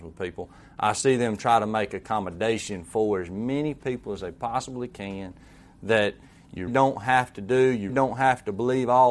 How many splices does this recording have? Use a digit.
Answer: 2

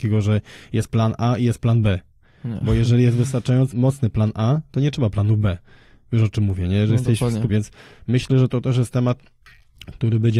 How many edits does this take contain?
2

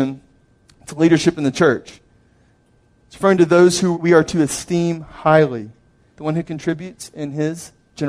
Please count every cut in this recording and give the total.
2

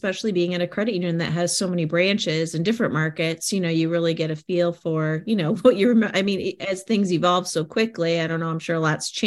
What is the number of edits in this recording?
0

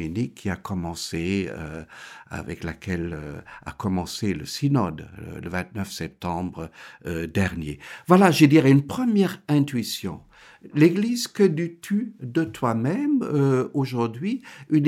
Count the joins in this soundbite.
0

